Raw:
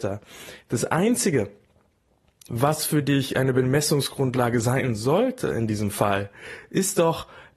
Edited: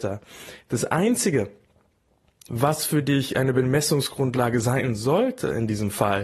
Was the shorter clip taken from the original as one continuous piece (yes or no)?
yes